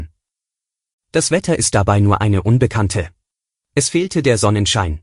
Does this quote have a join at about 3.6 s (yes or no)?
yes